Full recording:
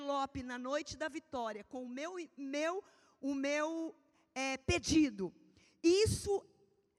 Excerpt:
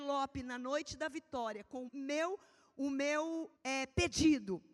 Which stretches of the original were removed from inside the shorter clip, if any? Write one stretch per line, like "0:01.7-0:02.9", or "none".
0:01.9-0:02.3
0:04.0-0:04.3